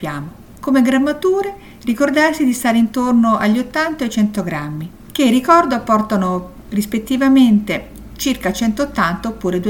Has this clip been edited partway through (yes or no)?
no